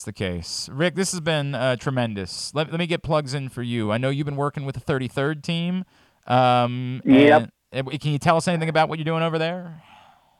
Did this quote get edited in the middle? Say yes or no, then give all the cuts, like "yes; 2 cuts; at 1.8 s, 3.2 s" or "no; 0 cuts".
no; 0 cuts